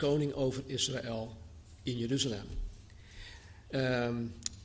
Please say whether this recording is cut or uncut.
cut